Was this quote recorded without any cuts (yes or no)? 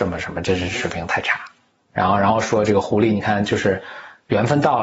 yes